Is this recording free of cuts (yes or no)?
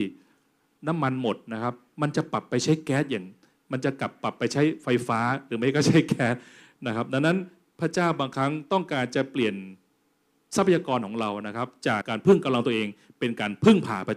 no